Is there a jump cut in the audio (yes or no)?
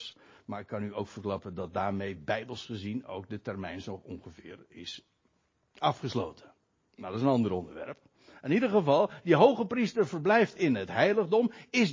no